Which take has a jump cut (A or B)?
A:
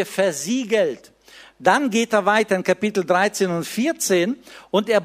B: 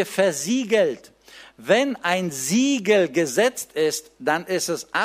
A